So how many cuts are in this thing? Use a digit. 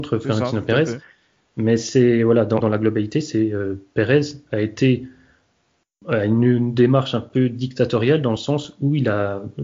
1